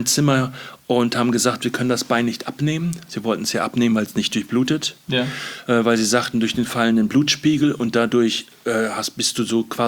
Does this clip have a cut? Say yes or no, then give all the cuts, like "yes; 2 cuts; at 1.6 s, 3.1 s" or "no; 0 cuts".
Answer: no; 0 cuts